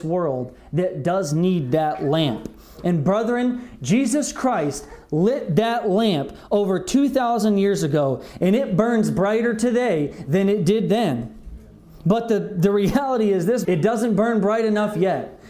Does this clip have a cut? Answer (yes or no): yes